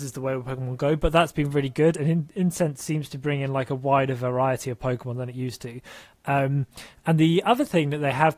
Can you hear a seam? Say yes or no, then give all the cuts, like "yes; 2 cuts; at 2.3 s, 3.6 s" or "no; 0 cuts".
no; 0 cuts